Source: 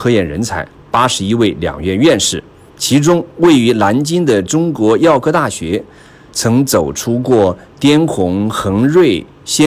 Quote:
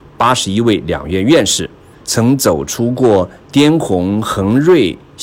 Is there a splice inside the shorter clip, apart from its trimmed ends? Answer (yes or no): yes